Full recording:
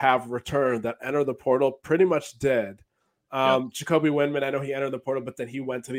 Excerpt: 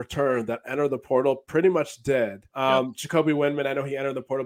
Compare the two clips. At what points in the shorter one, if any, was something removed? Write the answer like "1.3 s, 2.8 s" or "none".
2.5 s